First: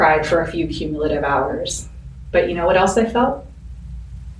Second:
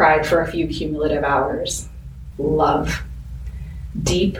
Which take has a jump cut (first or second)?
second